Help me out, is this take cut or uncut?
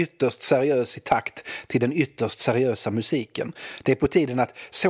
uncut